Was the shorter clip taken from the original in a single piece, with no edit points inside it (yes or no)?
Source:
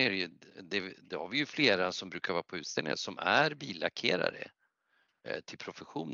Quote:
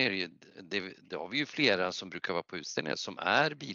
yes